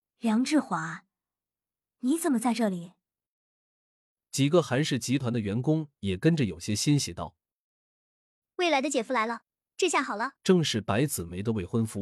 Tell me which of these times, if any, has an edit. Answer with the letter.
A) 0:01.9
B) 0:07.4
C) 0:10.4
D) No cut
C